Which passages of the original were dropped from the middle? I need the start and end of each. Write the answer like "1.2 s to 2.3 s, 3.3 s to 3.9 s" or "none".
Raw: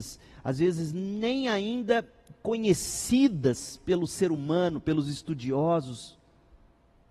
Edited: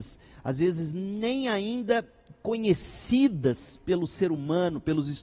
none